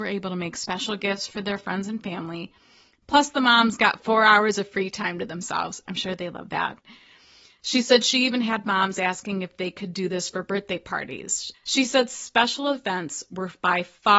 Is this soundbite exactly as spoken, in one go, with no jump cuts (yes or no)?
no